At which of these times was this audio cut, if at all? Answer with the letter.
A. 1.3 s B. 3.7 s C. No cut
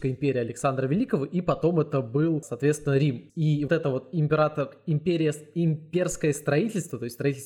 B